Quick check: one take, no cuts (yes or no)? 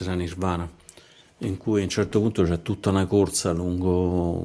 yes